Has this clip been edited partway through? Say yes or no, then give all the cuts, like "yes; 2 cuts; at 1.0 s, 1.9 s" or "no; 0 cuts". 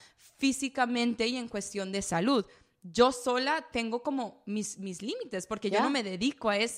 no; 0 cuts